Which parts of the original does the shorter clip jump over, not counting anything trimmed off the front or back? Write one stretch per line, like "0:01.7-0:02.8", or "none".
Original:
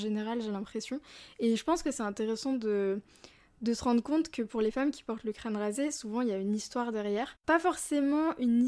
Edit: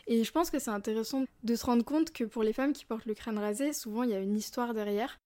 0:02.6-0:03.4